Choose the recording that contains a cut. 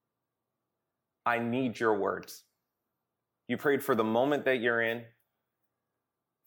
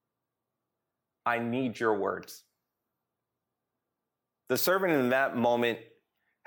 first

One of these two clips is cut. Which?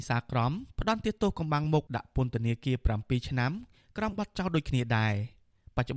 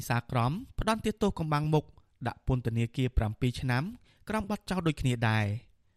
first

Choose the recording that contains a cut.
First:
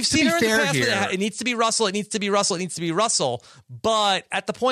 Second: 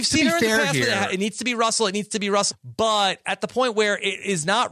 second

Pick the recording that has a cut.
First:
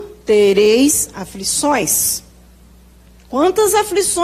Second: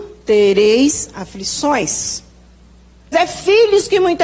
second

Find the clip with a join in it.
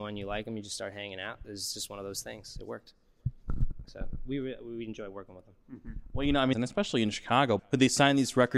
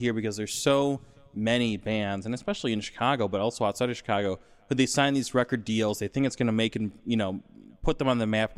first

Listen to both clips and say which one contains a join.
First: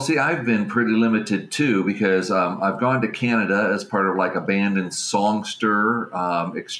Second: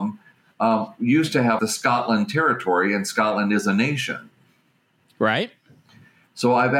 second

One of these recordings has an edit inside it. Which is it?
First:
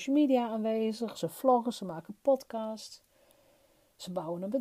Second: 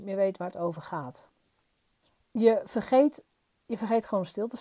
first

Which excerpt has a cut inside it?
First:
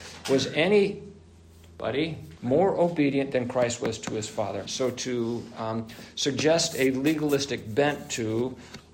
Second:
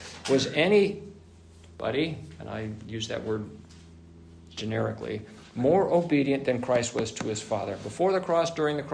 first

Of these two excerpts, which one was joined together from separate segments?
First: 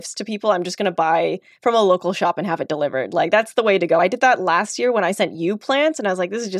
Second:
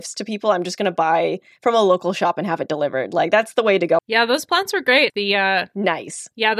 second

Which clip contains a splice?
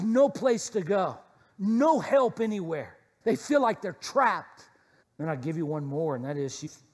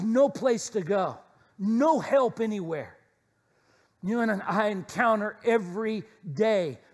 first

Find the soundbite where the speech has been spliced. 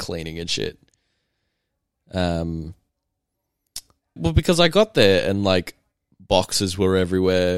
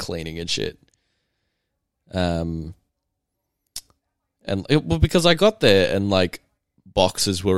first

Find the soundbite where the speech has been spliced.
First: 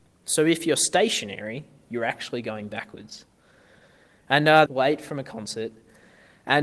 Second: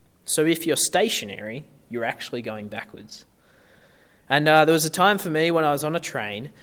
first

